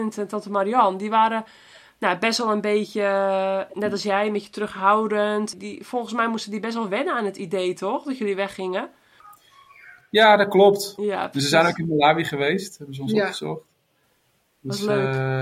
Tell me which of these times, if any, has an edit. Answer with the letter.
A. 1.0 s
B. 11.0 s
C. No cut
B